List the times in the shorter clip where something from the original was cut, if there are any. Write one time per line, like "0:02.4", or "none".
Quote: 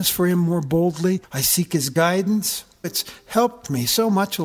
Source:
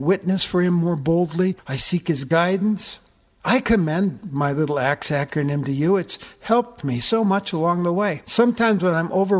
0:02.8

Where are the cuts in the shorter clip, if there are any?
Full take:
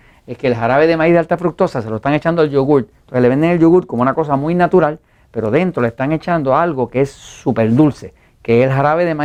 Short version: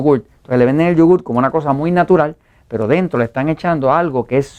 none

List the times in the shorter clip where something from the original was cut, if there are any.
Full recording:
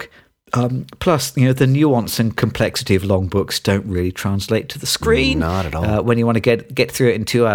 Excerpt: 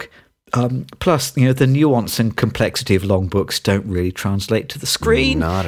none

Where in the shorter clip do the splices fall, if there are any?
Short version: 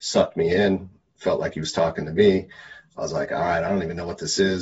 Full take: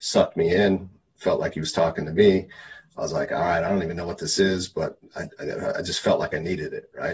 none

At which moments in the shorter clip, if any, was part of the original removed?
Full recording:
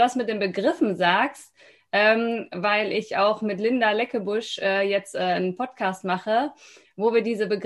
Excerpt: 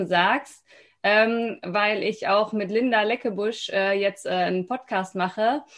none

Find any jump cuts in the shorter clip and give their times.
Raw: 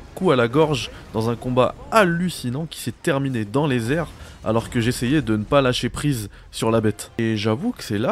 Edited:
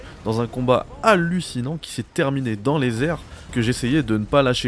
0:03.5

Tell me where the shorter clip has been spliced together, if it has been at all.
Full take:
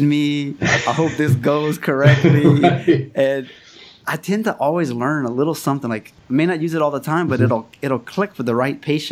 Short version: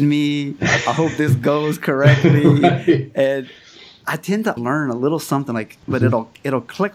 0:04.6
0:05.9

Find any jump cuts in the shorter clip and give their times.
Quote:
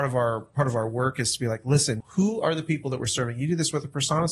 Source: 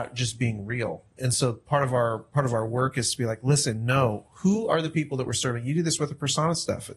0:02.0

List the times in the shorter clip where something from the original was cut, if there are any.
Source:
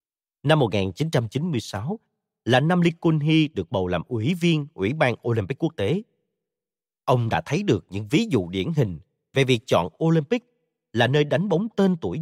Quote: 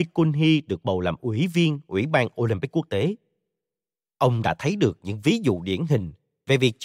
none

